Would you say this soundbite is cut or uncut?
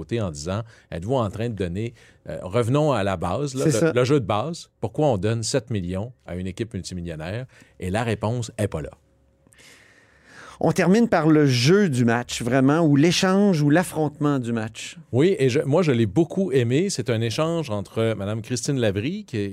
uncut